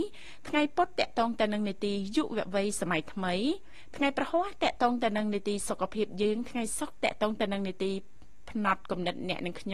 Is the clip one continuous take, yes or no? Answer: yes